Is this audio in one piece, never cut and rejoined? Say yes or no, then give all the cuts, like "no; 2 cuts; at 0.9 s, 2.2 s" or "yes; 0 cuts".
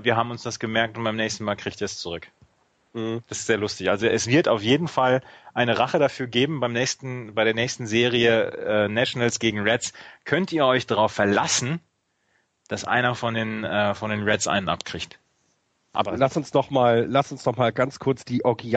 yes; 0 cuts